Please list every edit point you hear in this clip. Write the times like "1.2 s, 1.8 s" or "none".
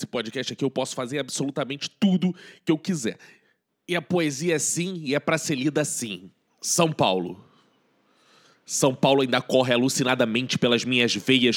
none